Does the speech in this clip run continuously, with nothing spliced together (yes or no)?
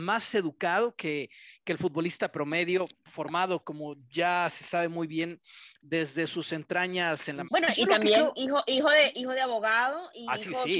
no